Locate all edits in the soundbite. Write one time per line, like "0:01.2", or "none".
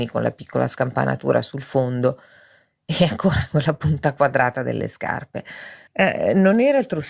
0:05.9